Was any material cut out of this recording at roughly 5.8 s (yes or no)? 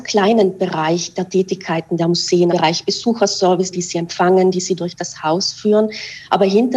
no